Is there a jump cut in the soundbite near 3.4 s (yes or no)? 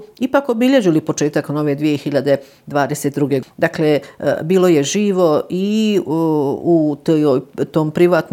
yes